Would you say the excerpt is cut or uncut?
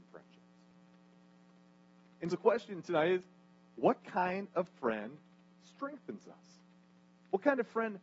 cut